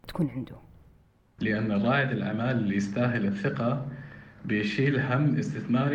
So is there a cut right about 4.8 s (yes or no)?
no